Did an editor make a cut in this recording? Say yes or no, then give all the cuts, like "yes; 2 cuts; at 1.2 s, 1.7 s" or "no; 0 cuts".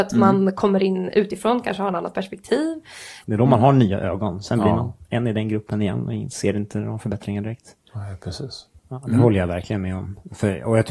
yes; 2 cuts; at 3.2 s, 8.8 s